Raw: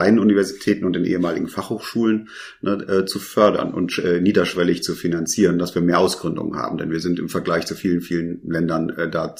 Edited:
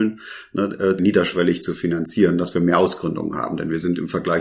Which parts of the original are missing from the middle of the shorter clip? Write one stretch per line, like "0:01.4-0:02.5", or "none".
0:03.1-0:04.2